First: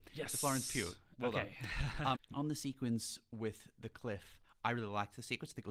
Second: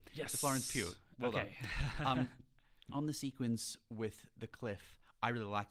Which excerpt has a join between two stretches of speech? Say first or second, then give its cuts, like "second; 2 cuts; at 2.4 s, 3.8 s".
first; 1 cut; at 2.1 s